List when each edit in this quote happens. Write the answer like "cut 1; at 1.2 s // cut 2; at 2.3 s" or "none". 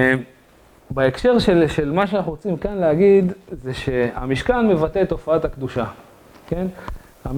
none